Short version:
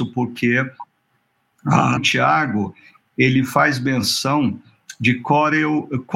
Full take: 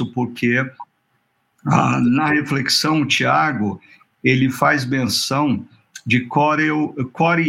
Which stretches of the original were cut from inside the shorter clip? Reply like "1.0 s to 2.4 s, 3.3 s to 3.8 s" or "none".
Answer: 2.0 s to 3.0 s

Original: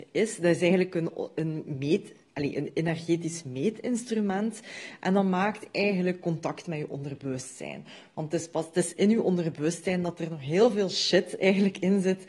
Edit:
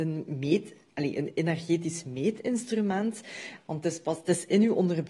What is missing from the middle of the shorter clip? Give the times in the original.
5.0 s to 8.1 s

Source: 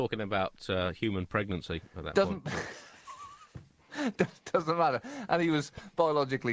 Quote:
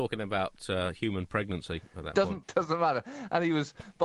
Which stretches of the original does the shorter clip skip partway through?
2.4 s to 4.4 s

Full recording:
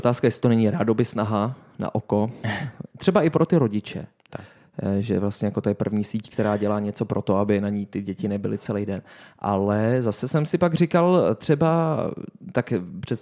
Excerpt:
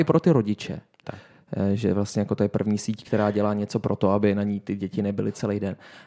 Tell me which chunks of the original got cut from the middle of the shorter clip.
none

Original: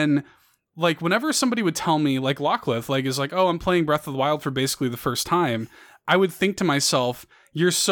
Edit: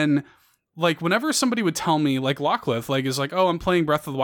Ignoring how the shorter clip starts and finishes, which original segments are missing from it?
none

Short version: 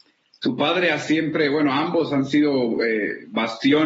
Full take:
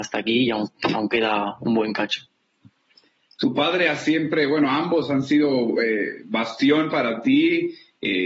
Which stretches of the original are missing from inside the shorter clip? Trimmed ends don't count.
none

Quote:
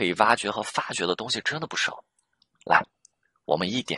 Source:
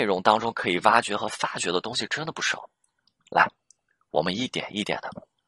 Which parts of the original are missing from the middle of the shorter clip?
none

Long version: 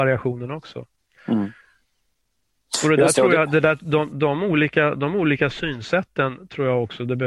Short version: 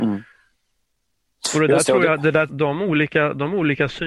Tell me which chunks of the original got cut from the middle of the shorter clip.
3.8 s to 4.1 s

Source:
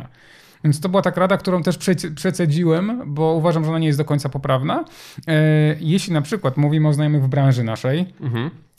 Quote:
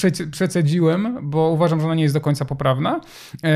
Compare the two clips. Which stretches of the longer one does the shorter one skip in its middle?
none

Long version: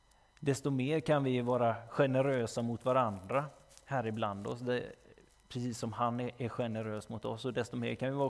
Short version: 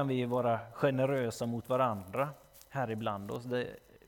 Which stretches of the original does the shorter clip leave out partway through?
none

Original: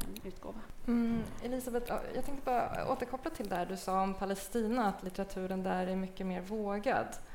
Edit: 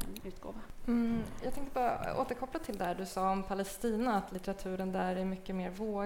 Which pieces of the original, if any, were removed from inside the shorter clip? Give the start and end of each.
1.4 s to 2.1 s

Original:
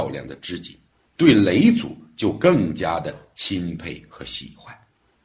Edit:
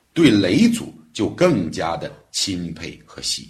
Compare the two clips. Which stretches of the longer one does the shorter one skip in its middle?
none

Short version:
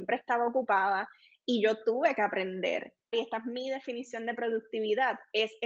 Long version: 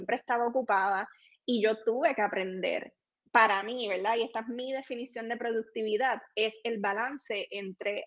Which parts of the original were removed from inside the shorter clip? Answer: 3.1 s to 4.2 s

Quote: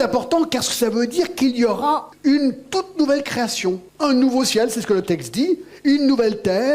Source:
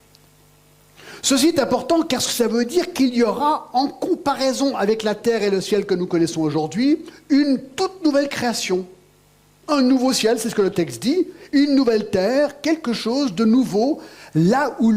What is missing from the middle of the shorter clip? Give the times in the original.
3.7 s to 7.2 s, 8.9 s to 9.6 s

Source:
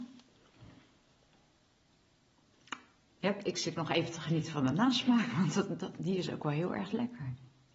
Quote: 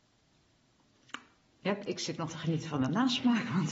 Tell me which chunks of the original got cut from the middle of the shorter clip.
3.9 s to 4.1 s

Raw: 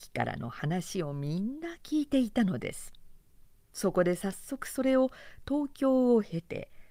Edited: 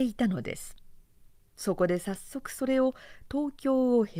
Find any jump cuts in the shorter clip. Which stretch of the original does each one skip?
none

